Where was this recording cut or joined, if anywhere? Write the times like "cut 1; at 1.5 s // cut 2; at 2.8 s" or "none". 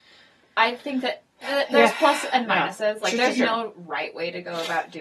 none